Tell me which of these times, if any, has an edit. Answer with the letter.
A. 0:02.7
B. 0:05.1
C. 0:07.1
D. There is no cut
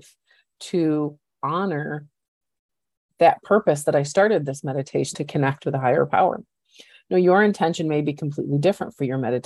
B